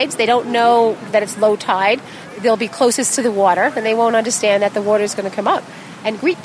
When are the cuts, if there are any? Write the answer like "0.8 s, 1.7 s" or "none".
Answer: none